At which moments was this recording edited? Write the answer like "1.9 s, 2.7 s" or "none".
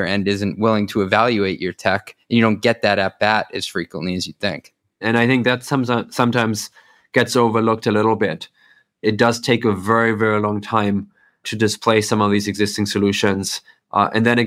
none